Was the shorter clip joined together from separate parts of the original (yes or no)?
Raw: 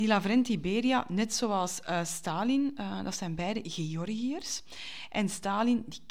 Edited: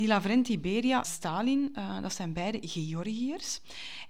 yes